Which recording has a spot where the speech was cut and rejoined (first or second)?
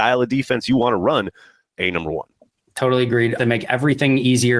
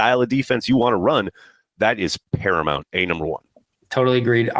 first